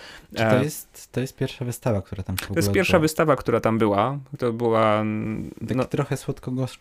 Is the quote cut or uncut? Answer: uncut